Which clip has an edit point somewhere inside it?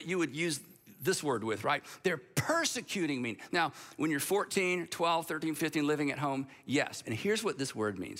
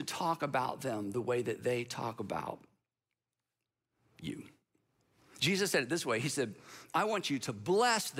first; 2 cuts; at 5.6 s, 7.0 s

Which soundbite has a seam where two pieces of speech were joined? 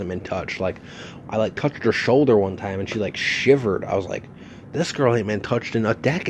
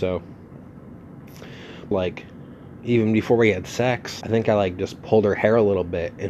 second; 2 cuts; at 1.9 s, 4.2 s

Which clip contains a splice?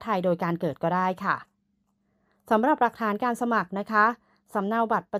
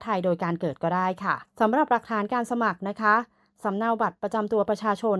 second; 1 cut; at 1.5 s

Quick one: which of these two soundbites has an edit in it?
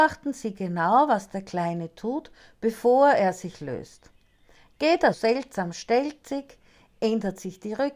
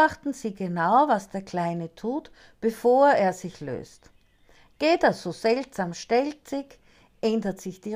first; 1 cut; at 5.1 s

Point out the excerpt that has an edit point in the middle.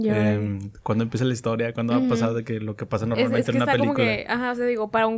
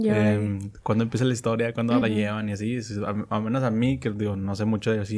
second; 1 cut; at 2.0 s

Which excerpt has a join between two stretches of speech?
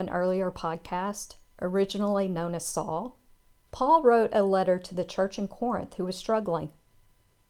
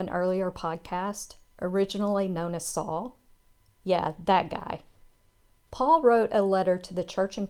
first; 1 cut; at 3.6 s

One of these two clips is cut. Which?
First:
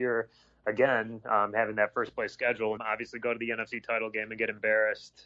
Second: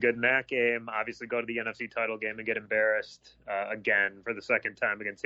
first; 1 cut; at 2.8 s

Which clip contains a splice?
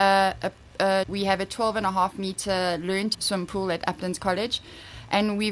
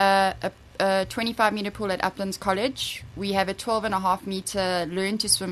first; 2 cuts; at 1.0 s, 3.1 s

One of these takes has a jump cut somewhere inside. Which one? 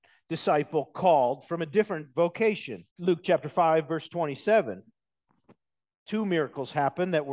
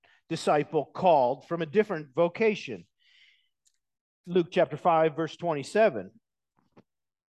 first; 1 cut; at 2.9 s

